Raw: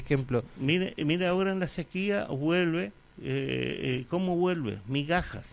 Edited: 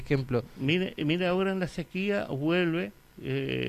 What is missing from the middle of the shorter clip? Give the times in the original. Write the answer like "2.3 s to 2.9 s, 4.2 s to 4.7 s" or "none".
none